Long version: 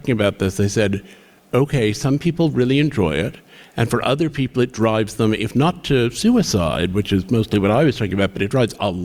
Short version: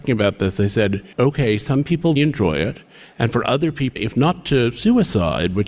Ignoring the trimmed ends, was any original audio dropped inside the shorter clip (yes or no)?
yes